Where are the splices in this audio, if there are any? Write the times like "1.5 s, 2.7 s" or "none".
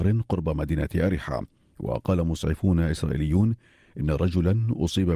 none